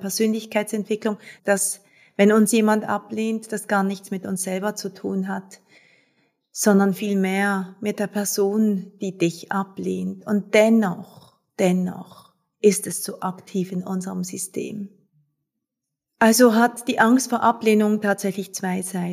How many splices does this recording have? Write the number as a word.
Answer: one